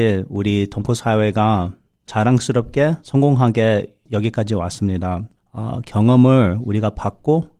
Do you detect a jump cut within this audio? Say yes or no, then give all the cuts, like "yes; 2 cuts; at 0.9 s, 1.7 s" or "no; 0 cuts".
no; 0 cuts